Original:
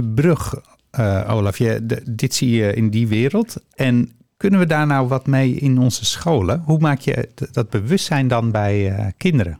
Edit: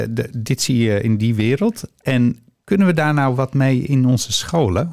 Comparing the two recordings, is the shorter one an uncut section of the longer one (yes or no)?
yes